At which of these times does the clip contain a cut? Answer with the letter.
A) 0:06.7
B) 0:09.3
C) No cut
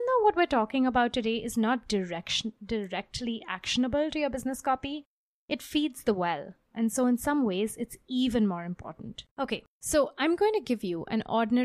B